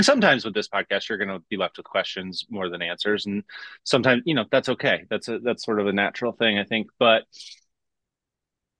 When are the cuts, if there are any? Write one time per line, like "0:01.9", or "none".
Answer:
none

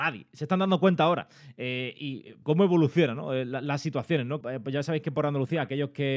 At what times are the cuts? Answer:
0:02.4
0:04.4

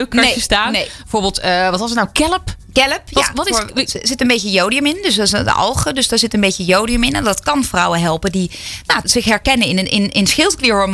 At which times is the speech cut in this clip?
0:09.0

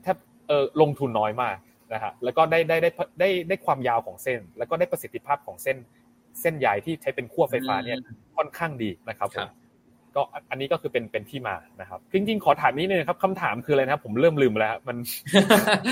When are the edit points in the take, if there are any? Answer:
0:09.0
0:12.1

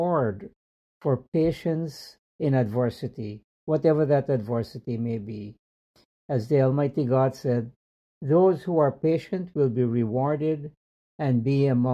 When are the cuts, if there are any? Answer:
none

